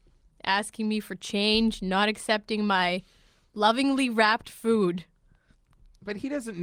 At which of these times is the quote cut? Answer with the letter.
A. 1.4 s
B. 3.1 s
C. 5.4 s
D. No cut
D